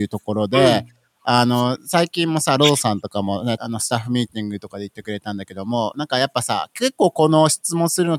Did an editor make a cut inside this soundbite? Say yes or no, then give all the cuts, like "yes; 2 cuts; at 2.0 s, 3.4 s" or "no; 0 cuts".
yes; 1 cut; at 3.6 s